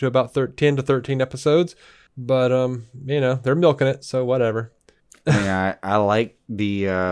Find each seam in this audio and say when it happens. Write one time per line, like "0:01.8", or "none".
none